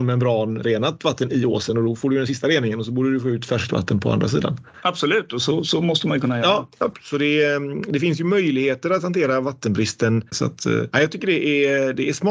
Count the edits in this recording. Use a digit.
1